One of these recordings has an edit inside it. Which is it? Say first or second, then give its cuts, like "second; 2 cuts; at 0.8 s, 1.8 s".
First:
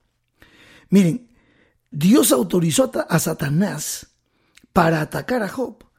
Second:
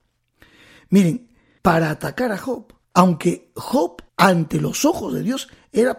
second; 3 cuts; at 1.6 s, 2.8 s, 4.1 s